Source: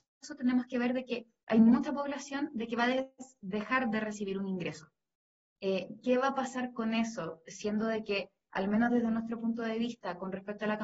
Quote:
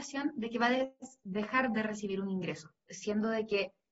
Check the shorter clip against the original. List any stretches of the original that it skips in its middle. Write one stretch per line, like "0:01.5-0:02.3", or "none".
0:05.0-0:07.4